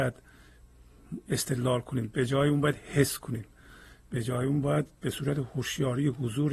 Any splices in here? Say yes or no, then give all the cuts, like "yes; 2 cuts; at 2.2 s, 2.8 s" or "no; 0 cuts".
no; 0 cuts